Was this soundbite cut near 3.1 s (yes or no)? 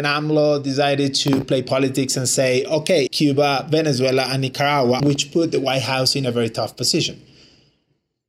yes